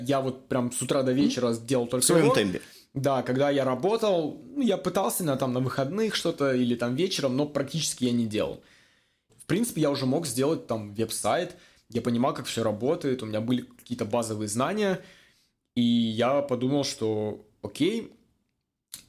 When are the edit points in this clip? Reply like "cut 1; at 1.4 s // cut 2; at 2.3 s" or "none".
cut 1; at 9.3 s